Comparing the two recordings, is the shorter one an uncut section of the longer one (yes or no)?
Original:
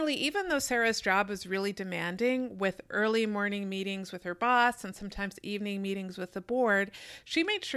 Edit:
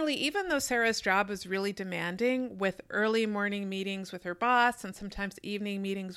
yes